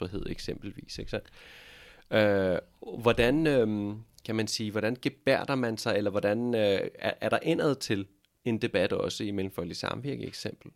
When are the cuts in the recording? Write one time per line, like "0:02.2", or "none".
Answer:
none